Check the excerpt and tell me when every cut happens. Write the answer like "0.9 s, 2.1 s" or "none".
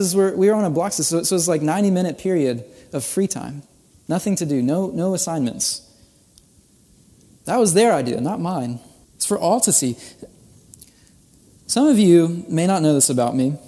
9.0 s